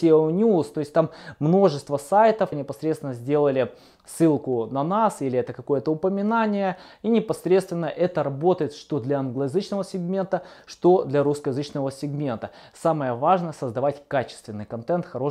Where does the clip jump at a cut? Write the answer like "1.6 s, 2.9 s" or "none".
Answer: 2.5 s